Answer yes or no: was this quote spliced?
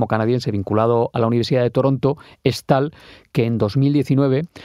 no